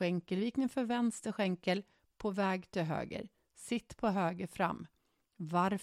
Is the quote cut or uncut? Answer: uncut